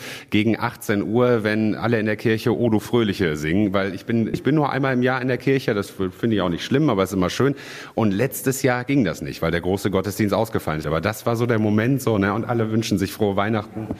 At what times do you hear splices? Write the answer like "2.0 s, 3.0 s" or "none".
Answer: 4.3 s, 10.8 s